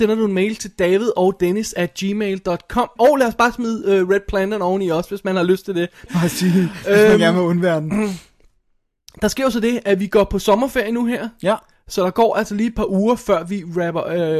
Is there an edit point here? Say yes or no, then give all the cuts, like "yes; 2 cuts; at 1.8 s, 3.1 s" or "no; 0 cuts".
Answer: yes; 2 cuts; at 3.0 s, 6.1 s